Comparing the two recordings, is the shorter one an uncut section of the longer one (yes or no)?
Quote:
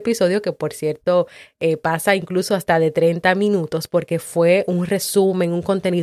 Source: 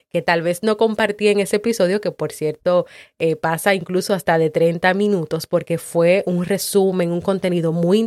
yes